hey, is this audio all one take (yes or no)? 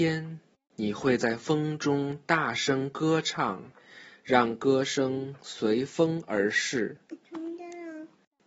no